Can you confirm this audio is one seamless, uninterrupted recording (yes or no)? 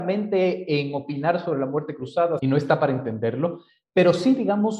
no